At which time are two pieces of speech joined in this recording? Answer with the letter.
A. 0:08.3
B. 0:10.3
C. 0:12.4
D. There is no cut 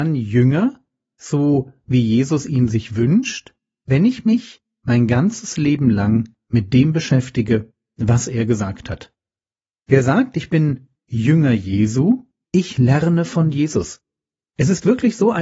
C